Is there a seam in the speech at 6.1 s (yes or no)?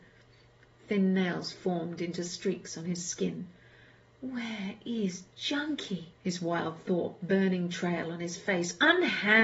yes